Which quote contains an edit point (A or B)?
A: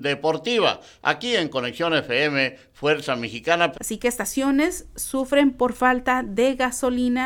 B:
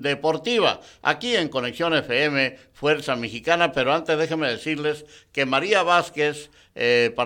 A